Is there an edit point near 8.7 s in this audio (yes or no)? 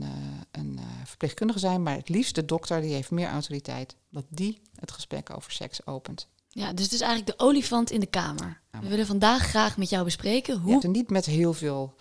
yes